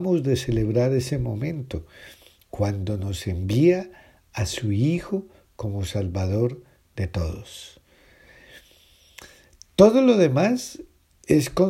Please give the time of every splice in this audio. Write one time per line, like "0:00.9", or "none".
none

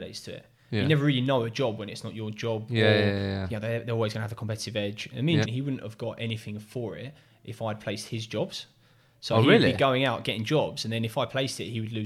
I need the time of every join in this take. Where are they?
0:05.4

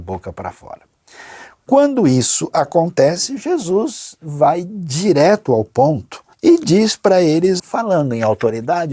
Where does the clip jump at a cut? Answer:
0:06.3
0:07.6

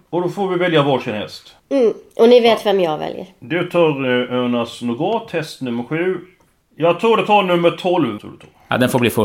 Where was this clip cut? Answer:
0:01.6
0:06.6
0:08.2

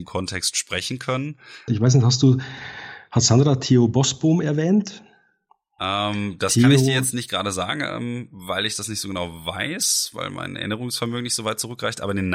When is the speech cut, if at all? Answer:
0:01.7

